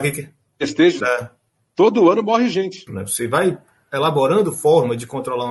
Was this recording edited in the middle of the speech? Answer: yes; 2 cuts; at 1.0 s, 2.9 s

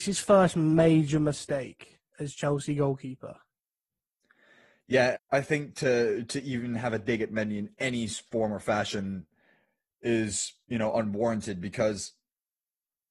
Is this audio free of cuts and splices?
no; 1 cut; at 5.1 s

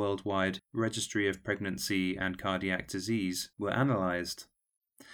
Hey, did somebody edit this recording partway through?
no; 0 cuts

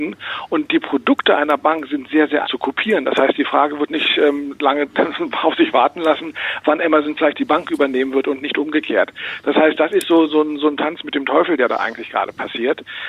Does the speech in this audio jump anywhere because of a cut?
yes; 1 cut; at 2.4 s

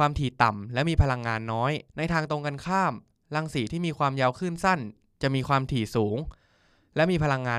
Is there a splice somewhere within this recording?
yes; 1 cut; at 1.9 s

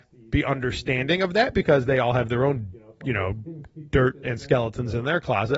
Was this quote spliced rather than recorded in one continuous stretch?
no; 0 cuts

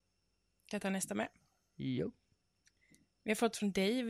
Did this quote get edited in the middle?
no; 0 cuts

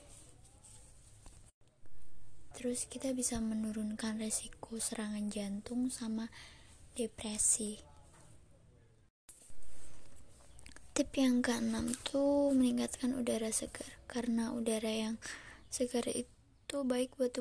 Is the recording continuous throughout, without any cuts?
no; 1 cut; at 2.5 s

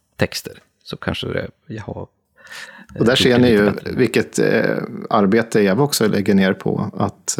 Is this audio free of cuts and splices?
yes; 0 cuts

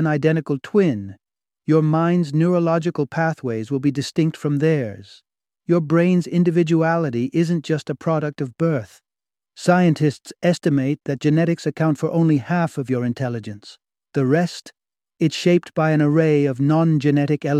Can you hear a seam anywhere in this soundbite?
no; 0 cuts

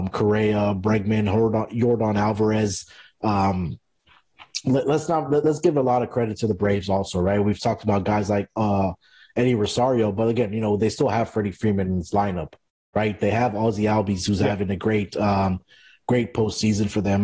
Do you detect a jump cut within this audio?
no; 0 cuts

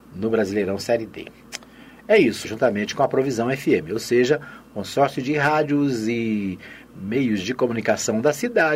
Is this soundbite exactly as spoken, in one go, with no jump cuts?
no; 1 cut; at 2.4 s

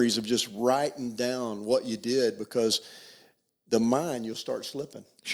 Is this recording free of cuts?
yes; 0 cuts

